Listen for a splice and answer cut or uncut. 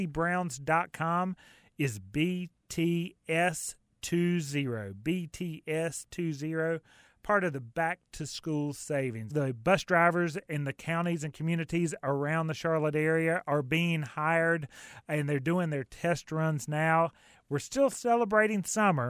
cut